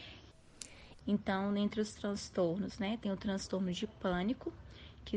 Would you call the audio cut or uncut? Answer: cut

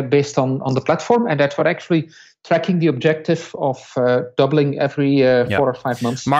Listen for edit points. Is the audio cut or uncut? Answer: uncut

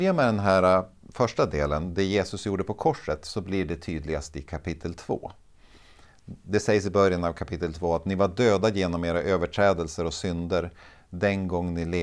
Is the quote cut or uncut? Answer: uncut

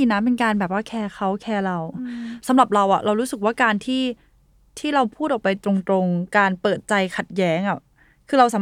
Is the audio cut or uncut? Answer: uncut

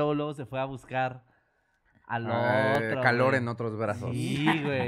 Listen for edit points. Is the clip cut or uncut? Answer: uncut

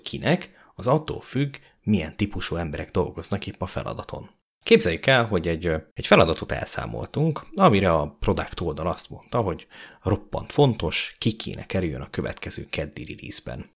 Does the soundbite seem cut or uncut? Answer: cut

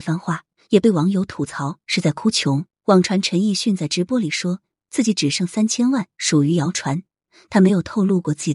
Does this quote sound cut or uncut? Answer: cut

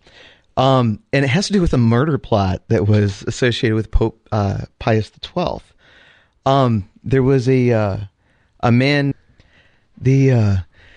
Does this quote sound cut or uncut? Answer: cut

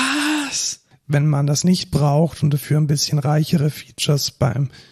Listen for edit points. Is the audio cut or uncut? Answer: cut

